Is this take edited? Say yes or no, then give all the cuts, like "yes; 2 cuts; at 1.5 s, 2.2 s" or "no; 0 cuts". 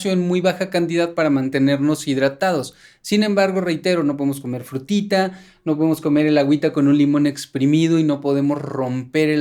no; 0 cuts